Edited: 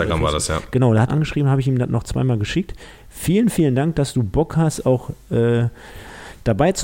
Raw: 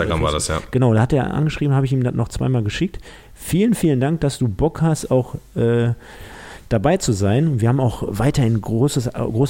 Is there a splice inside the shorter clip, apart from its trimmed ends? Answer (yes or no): yes